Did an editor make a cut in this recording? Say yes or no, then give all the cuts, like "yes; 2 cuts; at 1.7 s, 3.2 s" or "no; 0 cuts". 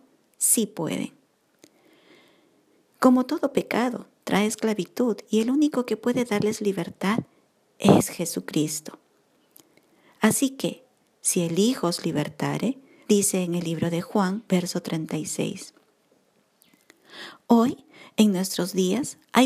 yes; 2 cuts; at 13.1 s, 14.5 s